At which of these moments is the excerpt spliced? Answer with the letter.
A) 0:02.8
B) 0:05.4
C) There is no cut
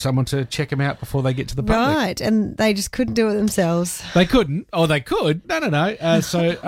B